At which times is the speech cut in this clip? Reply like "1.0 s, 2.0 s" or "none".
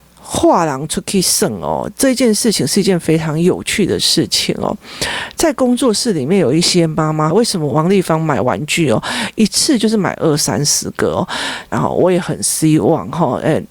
7.3 s, 11.7 s

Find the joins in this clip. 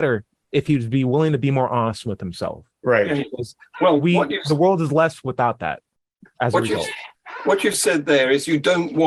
6.2 s

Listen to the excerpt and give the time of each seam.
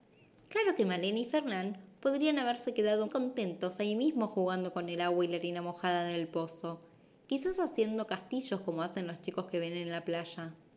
3.0 s

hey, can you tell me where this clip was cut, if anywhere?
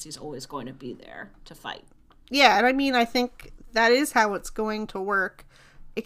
none

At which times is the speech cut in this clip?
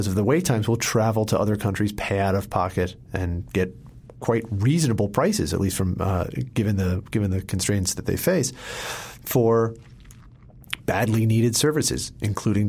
none

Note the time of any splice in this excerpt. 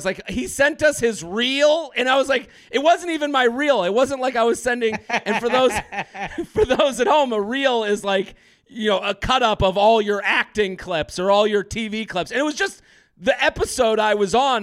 none

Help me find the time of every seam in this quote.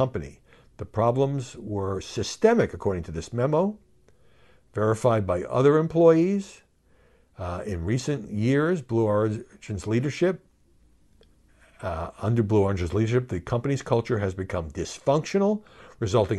none

